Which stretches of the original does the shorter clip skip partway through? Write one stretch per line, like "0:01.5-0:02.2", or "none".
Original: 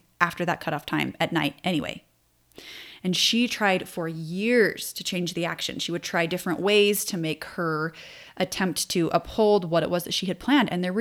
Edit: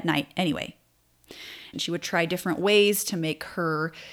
0:03.0-0:05.7